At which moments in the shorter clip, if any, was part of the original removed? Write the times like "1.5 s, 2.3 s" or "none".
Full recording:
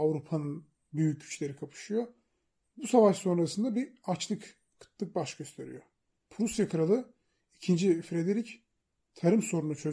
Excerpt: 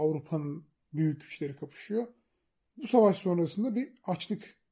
none